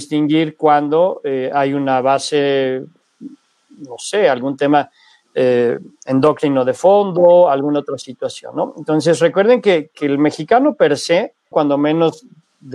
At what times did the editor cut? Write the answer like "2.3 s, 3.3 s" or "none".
11.5 s